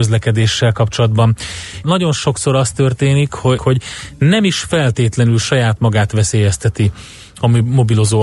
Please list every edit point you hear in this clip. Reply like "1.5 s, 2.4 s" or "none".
1.8 s, 3.6 s